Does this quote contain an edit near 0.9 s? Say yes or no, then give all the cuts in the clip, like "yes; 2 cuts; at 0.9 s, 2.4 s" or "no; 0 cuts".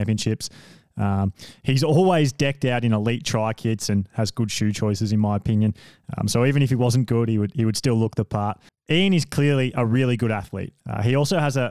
no; 2 cuts; at 8.7 s, 10.8 s